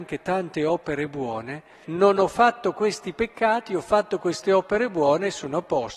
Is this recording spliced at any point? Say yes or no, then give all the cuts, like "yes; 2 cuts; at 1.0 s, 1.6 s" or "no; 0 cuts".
yes; 1 cut; at 1.8 s